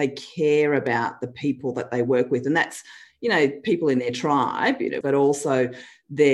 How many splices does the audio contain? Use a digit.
1